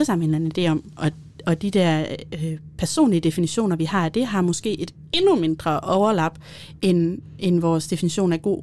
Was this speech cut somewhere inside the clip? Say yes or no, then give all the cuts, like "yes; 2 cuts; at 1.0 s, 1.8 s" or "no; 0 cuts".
no; 0 cuts